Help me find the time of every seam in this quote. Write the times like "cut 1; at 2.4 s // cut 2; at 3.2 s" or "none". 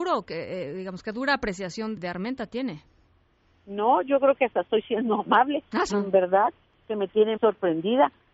cut 1; at 2.0 s // cut 2; at 5.9 s // cut 3; at 7.4 s